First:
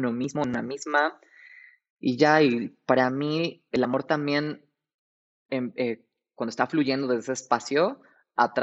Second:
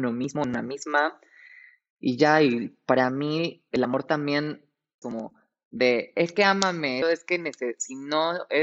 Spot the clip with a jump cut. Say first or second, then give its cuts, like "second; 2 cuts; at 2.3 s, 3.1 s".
second; 2 cuts; at 5.0 s, 7.0 s